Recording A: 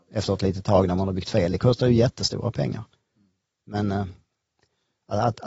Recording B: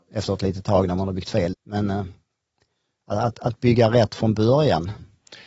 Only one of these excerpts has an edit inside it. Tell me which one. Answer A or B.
B